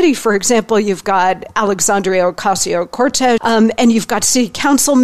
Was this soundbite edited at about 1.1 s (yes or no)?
no